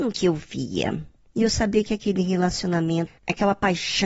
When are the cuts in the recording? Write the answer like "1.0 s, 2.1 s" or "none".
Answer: 1.3 s, 3.1 s